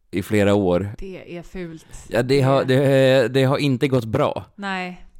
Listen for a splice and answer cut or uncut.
uncut